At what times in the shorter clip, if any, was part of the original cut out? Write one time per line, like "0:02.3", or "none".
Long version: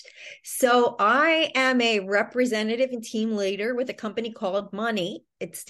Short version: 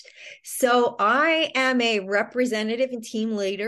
none

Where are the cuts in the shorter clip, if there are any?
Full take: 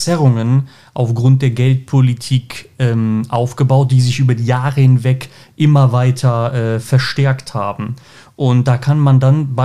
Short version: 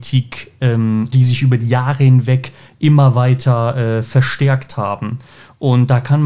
0:01.1

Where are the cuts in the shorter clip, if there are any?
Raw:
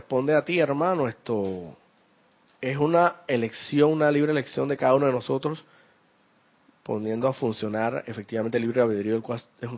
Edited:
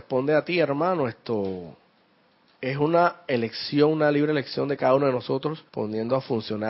0:05.7

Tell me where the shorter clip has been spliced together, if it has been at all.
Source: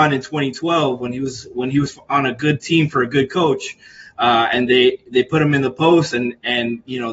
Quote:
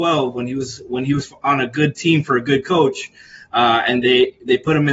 none

